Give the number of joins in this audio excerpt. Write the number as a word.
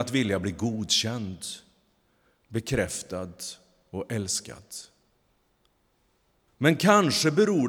one